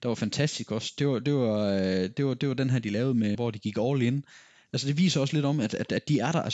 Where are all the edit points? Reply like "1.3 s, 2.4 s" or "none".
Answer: 3.3 s